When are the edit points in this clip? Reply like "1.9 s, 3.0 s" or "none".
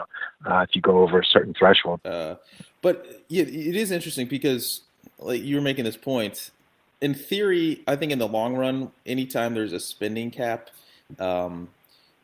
2.0 s